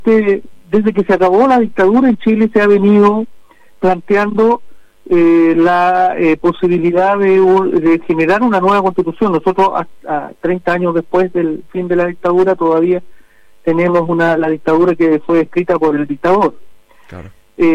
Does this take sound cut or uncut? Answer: uncut